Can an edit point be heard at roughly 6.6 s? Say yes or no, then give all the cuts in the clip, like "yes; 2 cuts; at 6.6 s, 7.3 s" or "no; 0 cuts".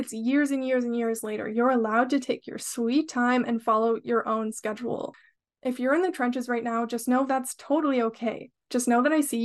no; 0 cuts